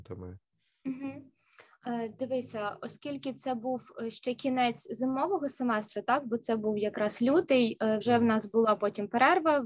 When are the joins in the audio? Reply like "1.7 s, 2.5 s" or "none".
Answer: none